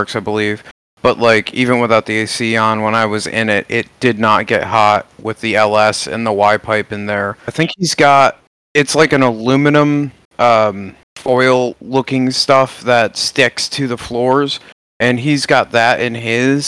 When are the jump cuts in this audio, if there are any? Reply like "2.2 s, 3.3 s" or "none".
7.5 s, 11.1 s